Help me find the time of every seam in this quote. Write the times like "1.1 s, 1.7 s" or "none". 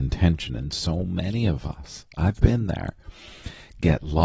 none